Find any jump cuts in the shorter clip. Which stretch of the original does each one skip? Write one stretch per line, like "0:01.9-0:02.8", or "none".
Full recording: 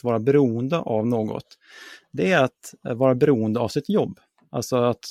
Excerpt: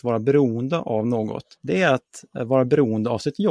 0:01.5-0:02.0